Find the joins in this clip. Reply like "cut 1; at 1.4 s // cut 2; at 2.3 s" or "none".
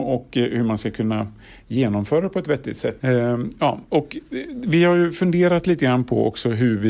cut 1; at 3.0 s